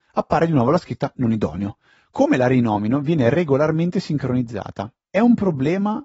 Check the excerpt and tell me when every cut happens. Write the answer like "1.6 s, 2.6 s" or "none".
5.1 s